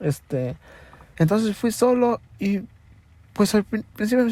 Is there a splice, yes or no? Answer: yes